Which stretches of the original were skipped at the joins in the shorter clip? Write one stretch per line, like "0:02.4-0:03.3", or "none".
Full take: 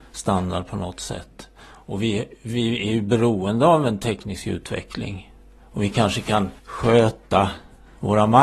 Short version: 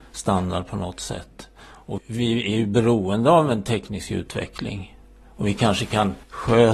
0:02.0-0:02.3